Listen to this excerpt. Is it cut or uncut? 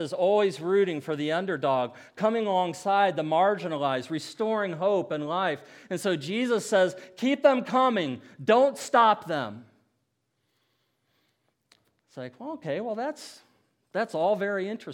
uncut